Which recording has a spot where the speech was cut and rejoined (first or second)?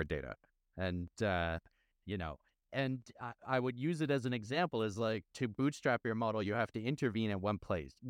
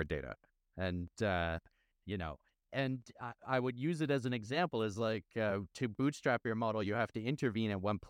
first